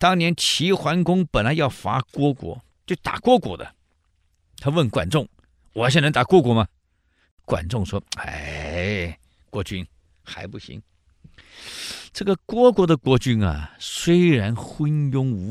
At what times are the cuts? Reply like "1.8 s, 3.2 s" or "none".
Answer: none